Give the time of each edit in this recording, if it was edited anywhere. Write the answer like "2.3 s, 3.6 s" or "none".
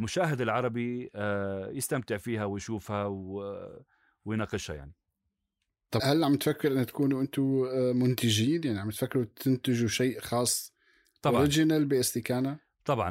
6.0 s